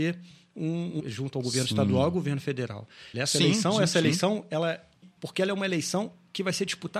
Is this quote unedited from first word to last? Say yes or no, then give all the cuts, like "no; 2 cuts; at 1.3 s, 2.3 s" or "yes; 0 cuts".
no; 3 cuts; at 1.0 s, 3.1 s, 5.2 s